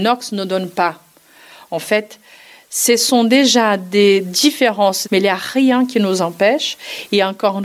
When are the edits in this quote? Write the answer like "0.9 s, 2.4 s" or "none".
5.0 s